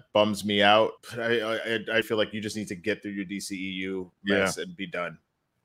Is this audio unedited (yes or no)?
no